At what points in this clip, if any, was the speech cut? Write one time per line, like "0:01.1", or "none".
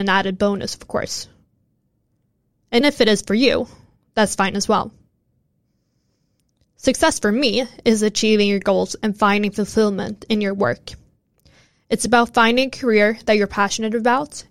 0:02.8